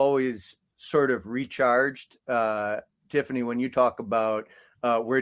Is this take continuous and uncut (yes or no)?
yes